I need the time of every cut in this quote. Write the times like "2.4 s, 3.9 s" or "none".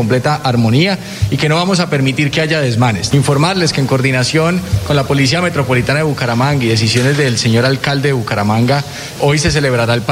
3.1 s, 9.2 s